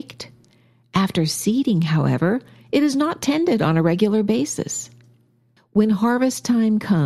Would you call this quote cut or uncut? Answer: cut